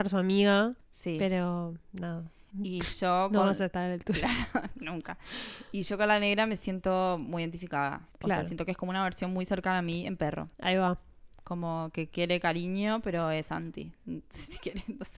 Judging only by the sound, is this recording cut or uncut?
cut